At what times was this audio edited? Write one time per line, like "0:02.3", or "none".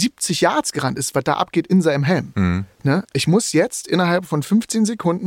0:03.0